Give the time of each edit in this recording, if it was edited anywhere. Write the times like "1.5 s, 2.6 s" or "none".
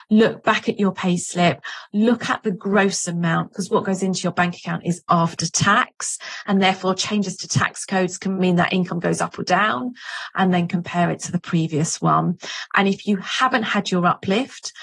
3.5 s, 10.3 s